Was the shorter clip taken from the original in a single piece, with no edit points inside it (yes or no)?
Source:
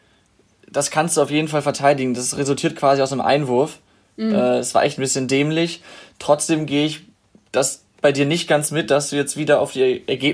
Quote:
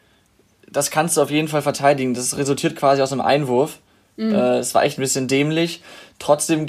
yes